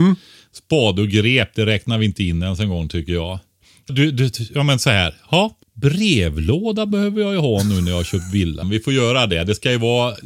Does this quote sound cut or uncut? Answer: cut